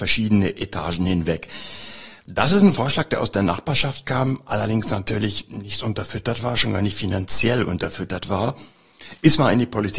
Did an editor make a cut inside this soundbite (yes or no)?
no